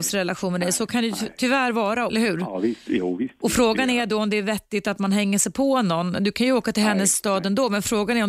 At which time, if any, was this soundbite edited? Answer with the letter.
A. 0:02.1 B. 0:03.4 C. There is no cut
A